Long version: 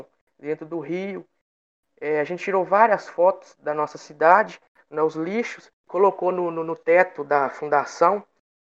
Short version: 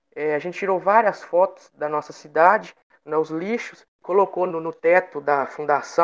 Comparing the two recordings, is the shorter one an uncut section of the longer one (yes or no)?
no